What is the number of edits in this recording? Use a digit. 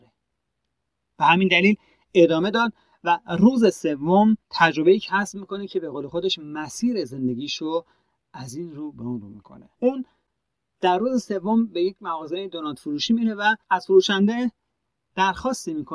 3